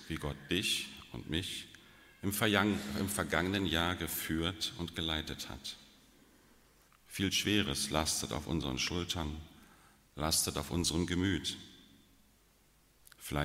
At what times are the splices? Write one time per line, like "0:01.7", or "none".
0:06.9